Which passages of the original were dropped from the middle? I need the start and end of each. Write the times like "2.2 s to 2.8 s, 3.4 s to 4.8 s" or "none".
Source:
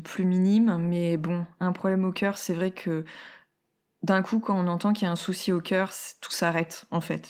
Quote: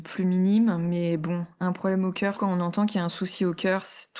2.3 s to 4.4 s